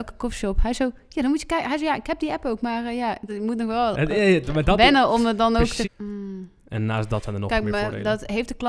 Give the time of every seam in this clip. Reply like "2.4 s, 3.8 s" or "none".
3.3 s, 5.8 s